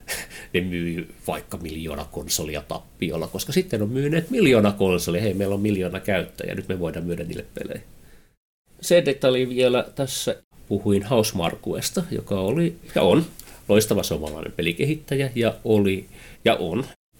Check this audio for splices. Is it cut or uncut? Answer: uncut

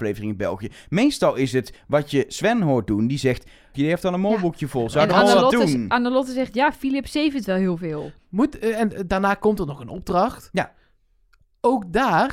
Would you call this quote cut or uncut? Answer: cut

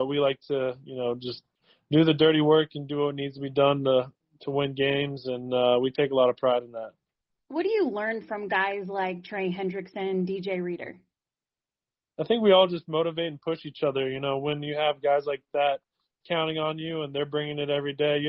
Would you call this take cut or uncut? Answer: uncut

